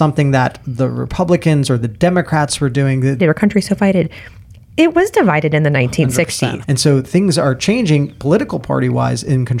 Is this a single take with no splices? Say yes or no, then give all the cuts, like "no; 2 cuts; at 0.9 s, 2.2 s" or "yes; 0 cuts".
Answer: no; 2 cuts; at 3.2 s, 6.6 s